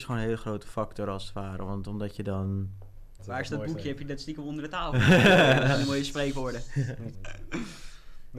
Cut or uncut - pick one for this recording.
cut